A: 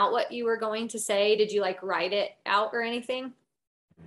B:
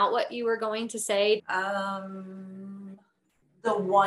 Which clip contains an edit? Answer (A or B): B